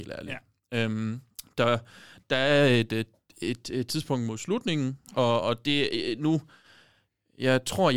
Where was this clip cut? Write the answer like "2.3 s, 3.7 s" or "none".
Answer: 2.2 s, 5.0 s

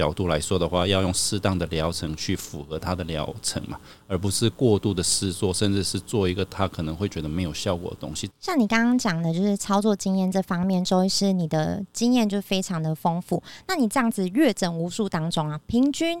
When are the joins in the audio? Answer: 8.3 s

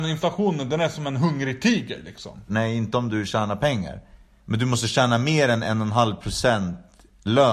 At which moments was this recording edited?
2.5 s

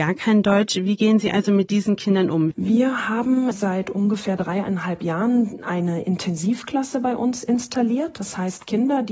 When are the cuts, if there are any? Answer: 2.5 s, 3.5 s

